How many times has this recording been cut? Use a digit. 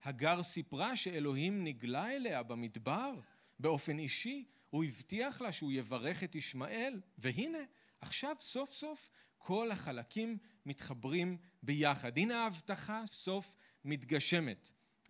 1